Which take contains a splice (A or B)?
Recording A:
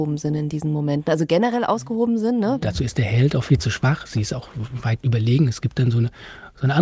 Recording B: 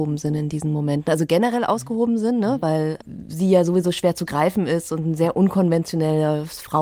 A